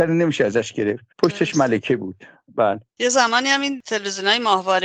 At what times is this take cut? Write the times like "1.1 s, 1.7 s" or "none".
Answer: 1.1 s